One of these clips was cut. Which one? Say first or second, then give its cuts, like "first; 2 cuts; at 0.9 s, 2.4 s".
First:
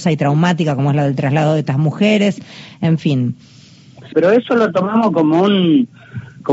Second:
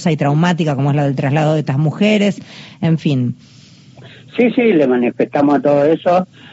first; 1 cut; at 4.1 s